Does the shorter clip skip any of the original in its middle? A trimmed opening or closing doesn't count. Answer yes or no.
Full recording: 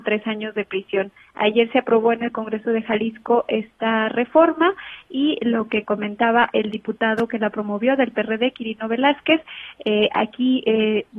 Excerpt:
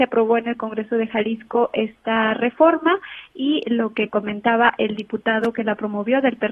no